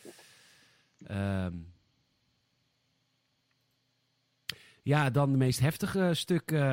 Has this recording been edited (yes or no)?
no